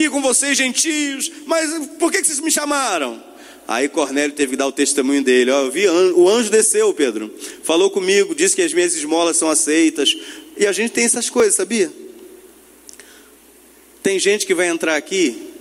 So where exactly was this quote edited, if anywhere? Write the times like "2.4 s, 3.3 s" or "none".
none

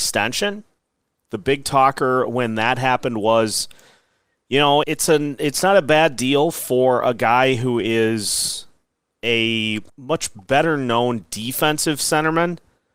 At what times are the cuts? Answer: 4.8 s, 9.9 s

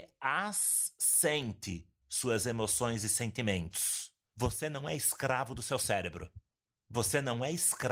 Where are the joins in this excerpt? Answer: 4.3 s

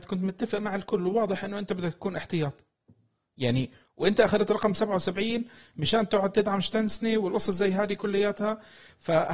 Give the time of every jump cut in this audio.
none

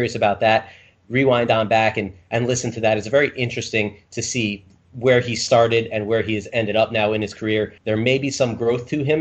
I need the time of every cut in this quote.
7.8 s

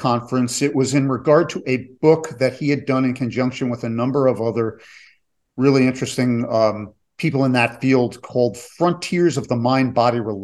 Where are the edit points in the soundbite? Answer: none

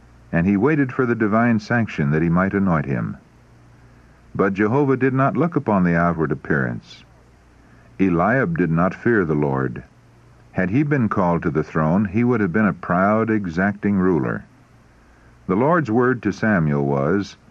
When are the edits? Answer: none

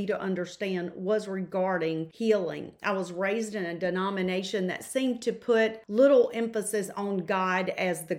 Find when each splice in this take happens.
none

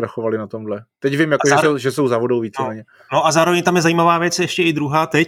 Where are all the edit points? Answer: none

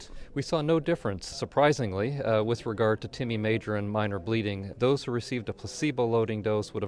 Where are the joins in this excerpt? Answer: 1.3 s, 4.7 s

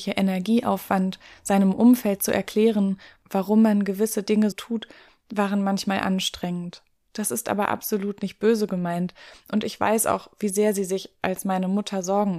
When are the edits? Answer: 4.5 s, 7.0 s

